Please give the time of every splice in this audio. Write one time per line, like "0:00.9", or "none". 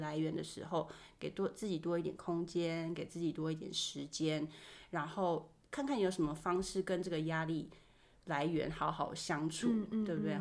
none